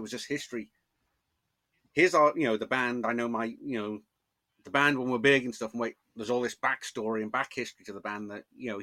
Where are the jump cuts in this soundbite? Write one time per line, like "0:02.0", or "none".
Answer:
none